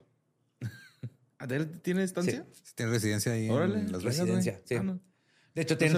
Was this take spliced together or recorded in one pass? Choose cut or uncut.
uncut